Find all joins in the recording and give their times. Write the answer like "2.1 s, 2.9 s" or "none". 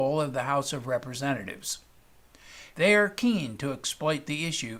2.7 s